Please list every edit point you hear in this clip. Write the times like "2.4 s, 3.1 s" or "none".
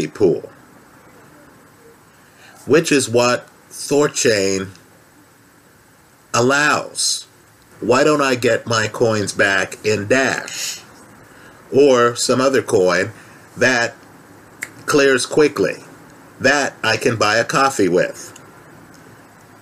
7.7 s